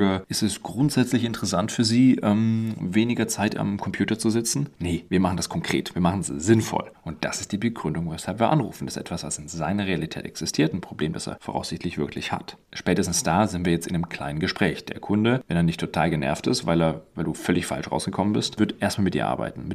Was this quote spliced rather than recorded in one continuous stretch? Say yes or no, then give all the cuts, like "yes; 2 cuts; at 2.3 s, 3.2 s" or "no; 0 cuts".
yes; 1 cut; at 6.9 s